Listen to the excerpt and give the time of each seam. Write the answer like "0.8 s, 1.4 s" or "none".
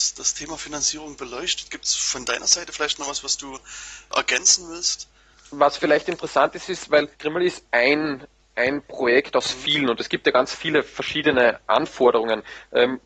7.1 s

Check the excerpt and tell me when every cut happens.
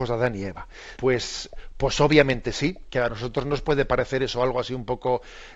1.0 s

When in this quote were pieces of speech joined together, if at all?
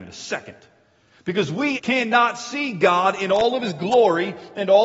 1.8 s

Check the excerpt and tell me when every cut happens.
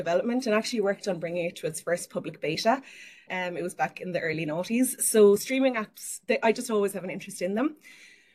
3.3 s

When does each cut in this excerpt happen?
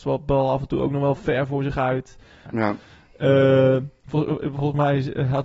2.4 s

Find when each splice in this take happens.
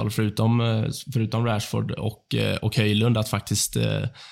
none

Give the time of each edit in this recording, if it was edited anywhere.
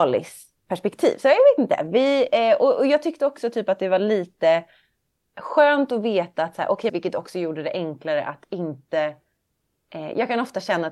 6.9 s

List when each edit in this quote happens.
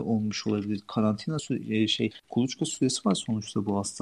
2.2 s

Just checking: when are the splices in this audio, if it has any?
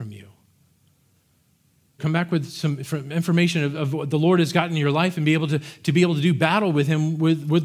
2.0 s

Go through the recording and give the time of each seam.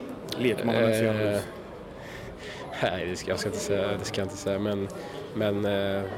none

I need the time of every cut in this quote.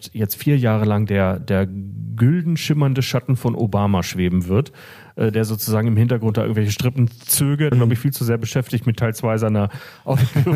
1.4 s, 7.7 s

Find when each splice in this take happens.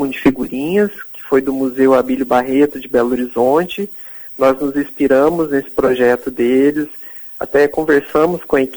none

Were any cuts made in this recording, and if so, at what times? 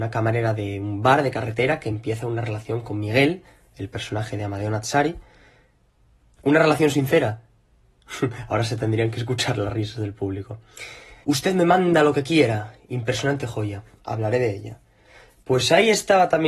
11.2 s

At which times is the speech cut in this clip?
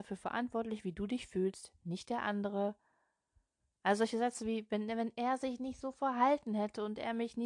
none

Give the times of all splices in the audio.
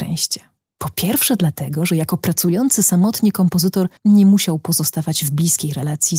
4.0 s

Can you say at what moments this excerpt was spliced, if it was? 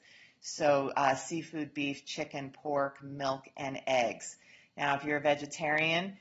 none

